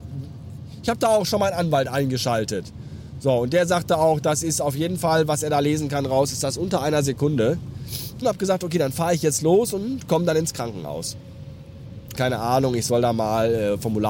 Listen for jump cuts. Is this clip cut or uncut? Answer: cut